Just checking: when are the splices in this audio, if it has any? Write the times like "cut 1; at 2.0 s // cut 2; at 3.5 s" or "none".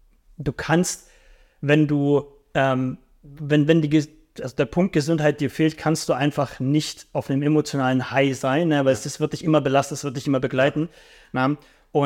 none